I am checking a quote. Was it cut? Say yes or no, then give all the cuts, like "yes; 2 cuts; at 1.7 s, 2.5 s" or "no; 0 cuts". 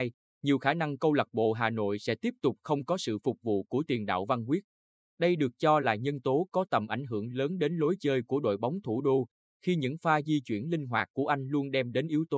no; 0 cuts